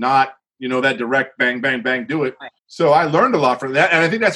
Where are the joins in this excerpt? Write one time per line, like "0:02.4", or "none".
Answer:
0:02.6